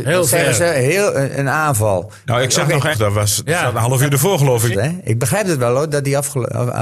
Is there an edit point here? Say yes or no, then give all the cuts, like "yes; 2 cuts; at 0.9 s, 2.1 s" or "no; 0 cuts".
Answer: yes; 2 cuts; at 2.9 s, 4.7 s